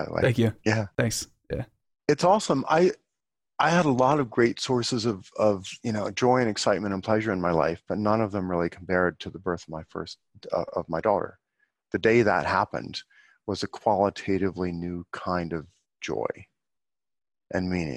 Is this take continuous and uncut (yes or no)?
yes